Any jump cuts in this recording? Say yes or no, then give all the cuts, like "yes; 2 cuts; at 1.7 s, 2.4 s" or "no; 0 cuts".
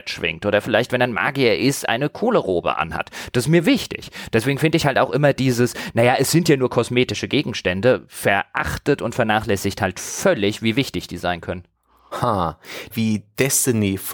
yes; 1 cut; at 12.9 s